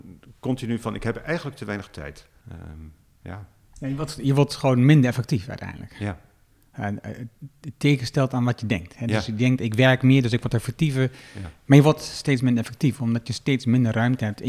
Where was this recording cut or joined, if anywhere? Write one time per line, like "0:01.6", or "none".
0:02.4